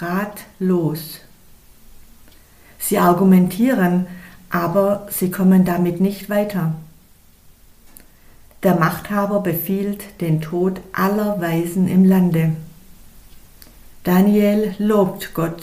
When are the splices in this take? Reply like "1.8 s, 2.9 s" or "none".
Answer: 13.9 s

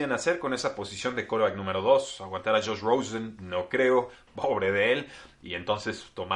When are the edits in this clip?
4.3 s

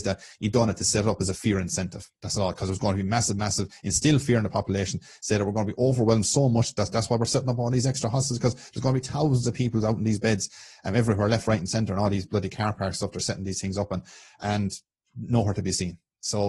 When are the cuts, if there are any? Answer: none

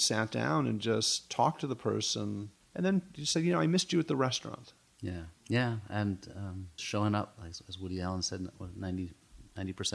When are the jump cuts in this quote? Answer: 2.6 s, 5.4 s, 6.8 s

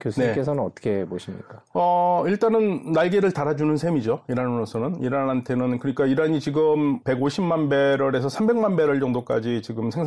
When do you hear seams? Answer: 7.0 s

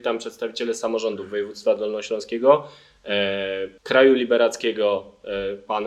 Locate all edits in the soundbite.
3.8 s

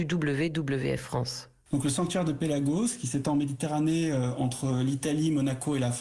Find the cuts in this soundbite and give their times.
none

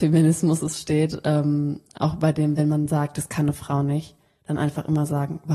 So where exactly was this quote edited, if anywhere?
none

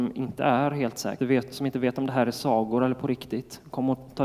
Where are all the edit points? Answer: 1.2 s

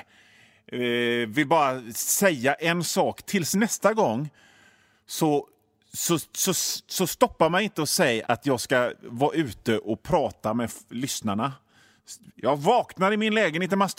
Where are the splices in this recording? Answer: 8.2 s, 12.4 s

